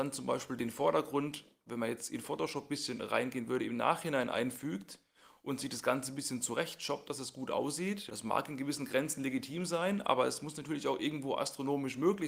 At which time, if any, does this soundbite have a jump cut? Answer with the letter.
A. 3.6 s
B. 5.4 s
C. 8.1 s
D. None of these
C